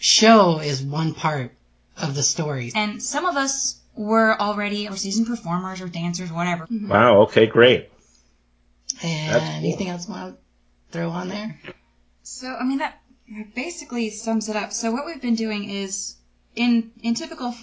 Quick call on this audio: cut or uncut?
cut